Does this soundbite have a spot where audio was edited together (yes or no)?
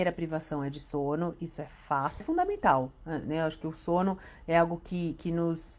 yes